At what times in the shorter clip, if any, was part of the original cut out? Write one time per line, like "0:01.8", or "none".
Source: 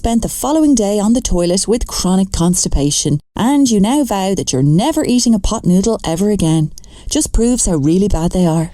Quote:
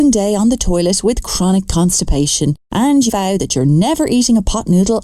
0:03.1